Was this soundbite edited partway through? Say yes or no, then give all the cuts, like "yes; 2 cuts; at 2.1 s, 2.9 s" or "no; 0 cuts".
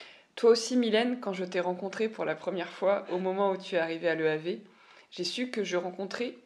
no; 0 cuts